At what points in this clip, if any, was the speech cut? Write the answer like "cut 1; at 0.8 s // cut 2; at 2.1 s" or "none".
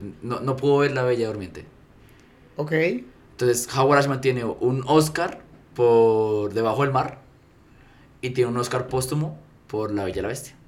none